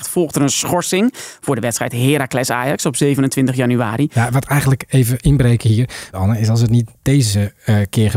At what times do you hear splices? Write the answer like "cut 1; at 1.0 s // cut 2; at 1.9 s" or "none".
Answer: cut 1; at 6.1 s